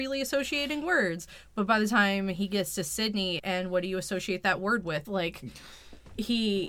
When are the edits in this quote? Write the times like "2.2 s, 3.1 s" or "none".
3.4 s, 5.0 s